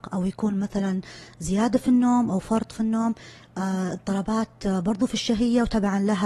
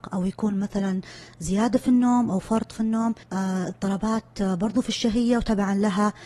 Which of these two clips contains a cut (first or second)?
second